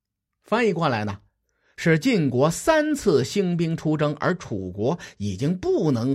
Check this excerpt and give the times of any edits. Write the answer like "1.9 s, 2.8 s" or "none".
none